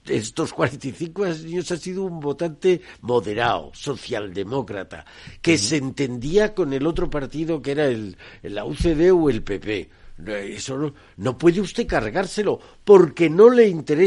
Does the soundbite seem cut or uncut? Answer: uncut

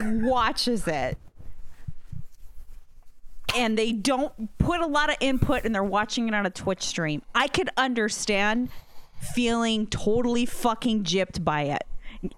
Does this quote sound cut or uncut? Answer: uncut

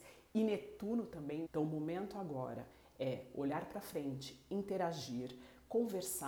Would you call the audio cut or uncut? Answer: cut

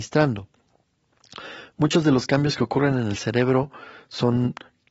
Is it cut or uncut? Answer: uncut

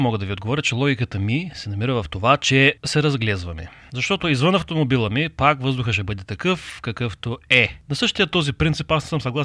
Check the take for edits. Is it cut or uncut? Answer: uncut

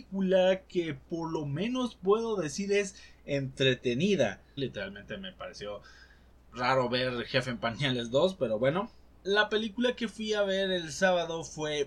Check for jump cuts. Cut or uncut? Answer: cut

